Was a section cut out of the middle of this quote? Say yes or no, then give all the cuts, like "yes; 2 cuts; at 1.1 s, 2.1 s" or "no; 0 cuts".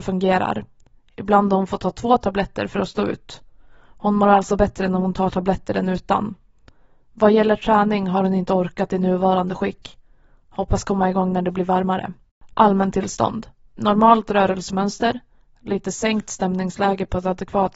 no; 0 cuts